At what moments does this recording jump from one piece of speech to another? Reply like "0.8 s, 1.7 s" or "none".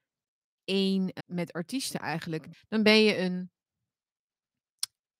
1.2 s, 2.5 s